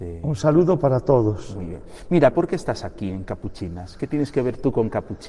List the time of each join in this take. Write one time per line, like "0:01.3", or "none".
0:02.3